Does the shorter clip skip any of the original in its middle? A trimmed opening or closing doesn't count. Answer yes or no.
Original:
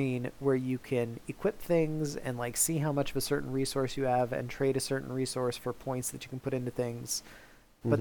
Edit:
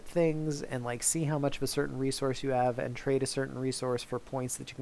no